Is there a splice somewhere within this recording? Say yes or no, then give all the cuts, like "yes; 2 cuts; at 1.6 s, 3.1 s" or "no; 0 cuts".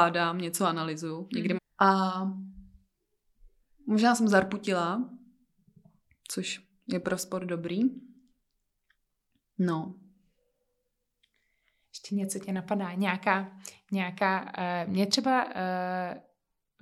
yes; 1 cut; at 1.6 s